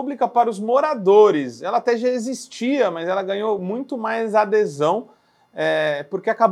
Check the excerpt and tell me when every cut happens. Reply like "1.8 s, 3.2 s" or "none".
none